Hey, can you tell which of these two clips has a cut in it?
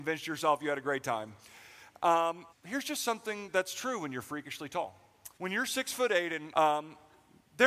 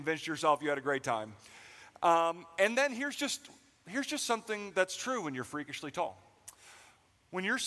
first; 3 cuts; at 2.5 s, 5.3 s, 6.5 s

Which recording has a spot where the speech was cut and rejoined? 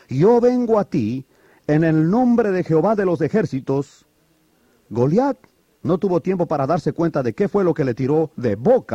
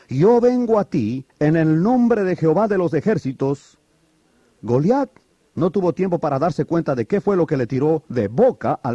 second; 1 cut; at 1.3 s

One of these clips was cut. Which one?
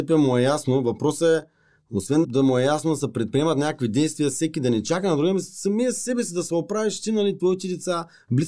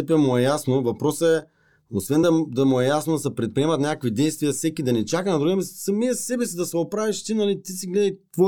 first; 2 cuts; at 2.2 s, 7.4 s

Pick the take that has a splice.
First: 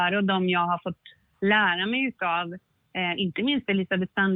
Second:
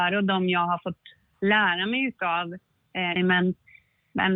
second; 1 cut; at 3.2 s

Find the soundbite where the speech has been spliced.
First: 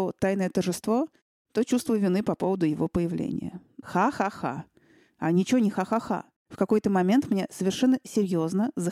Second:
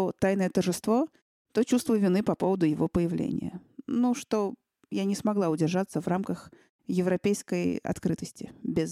first; 2 cuts; at 3.8 s, 6.4 s

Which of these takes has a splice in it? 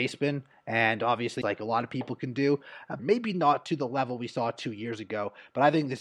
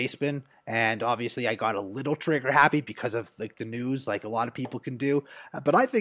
first; 2 cuts; at 1.4 s, 3.0 s

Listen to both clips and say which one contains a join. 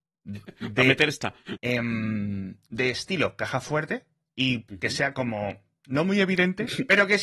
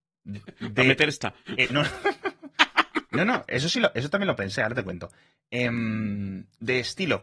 first; 1 cut; at 1.6 s

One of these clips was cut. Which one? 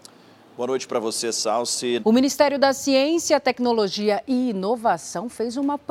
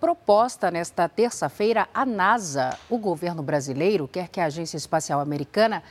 first; 1 cut; at 2.0 s

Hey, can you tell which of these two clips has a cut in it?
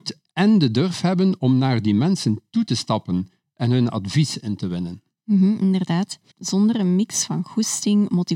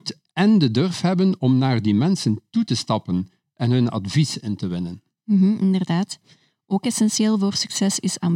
first; 1 cut; at 6.3 s

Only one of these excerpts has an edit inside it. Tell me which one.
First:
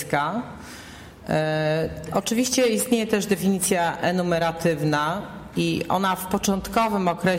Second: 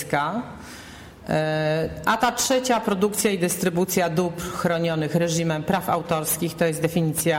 first; 1 cut; at 2.1 s

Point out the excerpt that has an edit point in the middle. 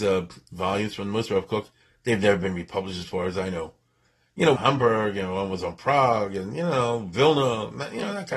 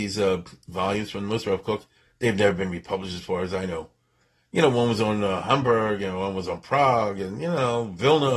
first; 1 cut; at 4.6 s

